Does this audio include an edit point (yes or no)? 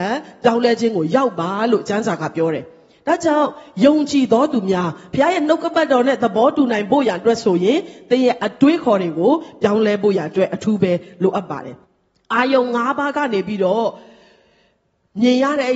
yes